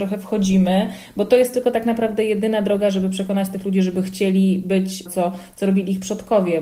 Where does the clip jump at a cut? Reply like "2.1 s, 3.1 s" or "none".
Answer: 5.1 s